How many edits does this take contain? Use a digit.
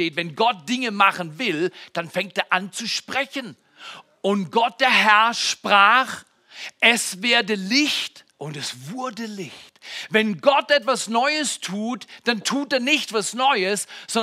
1